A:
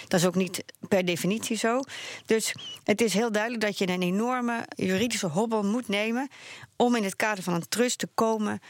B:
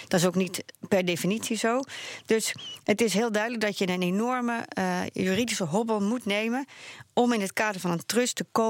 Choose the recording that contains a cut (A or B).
A